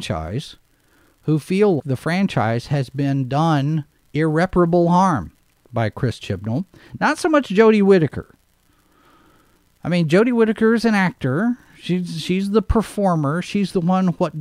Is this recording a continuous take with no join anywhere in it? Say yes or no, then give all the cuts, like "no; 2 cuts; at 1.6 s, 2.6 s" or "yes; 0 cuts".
no; 1 cut; at 1.8 s